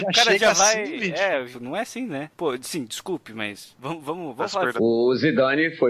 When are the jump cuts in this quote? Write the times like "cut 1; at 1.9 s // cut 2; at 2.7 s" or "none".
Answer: cut 1; at 1.5 s // cut 2; at 4.8 s